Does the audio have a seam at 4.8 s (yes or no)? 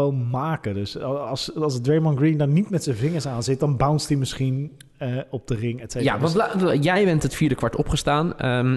no